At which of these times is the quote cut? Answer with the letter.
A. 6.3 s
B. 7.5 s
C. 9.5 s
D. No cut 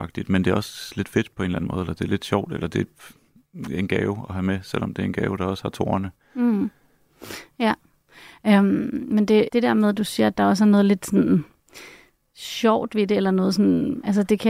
C